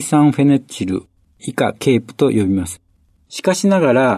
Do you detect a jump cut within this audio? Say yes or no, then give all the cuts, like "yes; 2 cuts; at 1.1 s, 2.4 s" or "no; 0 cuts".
yes; 1 cut; at 3.3 s